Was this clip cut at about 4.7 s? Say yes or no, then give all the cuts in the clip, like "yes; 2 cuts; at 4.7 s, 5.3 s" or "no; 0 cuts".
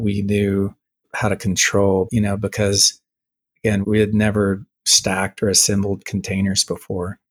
yes; 2 cuts; at 2.1 s, 4.7 s